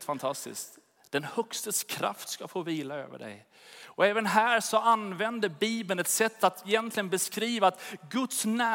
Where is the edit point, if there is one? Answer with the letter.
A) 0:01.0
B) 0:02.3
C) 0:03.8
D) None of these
D